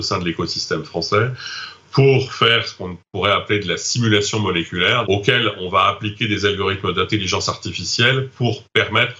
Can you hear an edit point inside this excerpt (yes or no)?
yes